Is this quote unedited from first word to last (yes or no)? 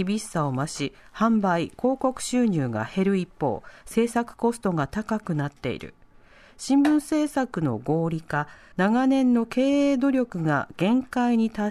no